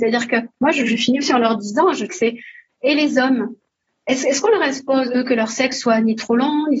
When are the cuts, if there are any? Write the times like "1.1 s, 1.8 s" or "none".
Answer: 2.1 s